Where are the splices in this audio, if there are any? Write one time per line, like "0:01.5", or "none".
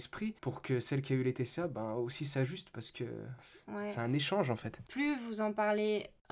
0:04.9